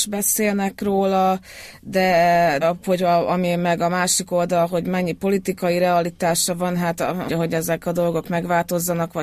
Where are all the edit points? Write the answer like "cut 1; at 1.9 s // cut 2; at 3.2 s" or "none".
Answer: cut 1; at 2.6 s // cut 2; at 7.3 s